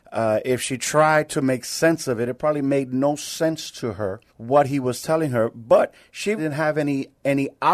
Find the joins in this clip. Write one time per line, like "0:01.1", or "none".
0:04.3
0:06.4